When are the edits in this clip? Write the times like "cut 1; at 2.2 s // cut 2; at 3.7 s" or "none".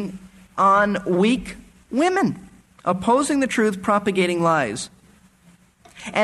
none